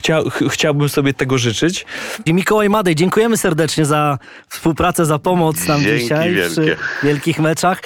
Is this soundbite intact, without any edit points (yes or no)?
no